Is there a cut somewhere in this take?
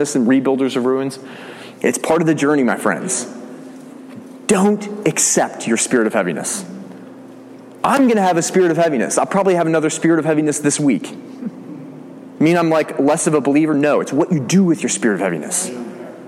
yes; 1 cut; at 1.8 s

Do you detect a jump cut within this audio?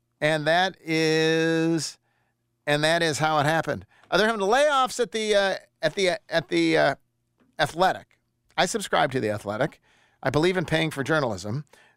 no; 0 cuts

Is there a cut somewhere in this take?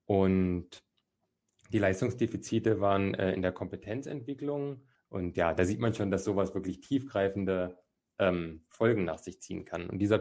yes; 1 cut; at 5.0 s

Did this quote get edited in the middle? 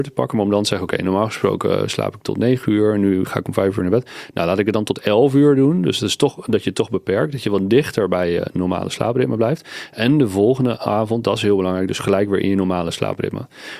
no; 0 cuts

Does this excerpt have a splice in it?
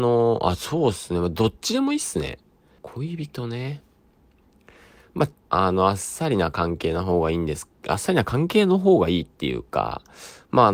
yes; 2 cuts; at 2.8 s, 5.3 s

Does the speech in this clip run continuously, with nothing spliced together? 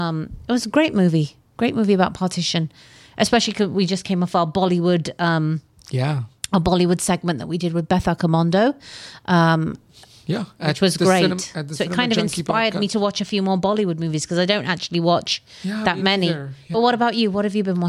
yes; 0 cuts

